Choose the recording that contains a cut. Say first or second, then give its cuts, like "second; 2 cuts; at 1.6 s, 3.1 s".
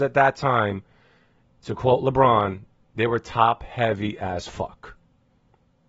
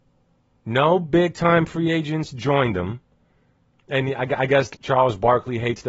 second; 2 cuts; at 3.7 s, 4.7 s